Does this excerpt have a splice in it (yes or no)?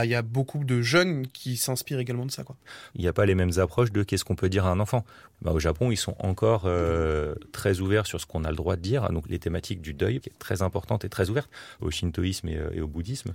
yes